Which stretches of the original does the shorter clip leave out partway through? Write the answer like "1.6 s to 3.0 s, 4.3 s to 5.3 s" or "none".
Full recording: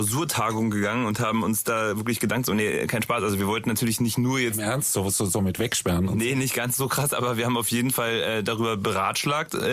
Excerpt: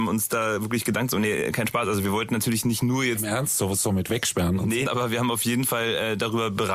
5.2 s to 5.3 s, 6.3 s to 7.1 s